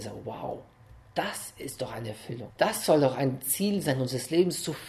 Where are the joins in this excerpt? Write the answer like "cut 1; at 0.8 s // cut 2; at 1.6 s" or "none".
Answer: cut 1; at 2.5 s